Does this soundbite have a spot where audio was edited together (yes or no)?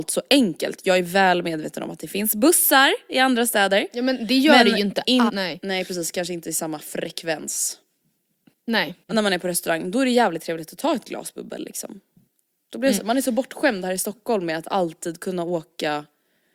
yes